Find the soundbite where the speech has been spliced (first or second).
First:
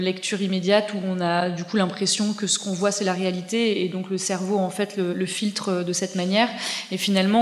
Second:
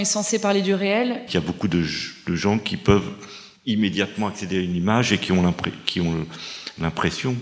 second